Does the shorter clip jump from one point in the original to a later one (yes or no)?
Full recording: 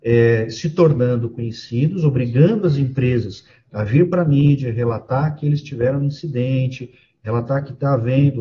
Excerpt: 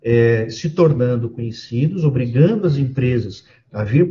no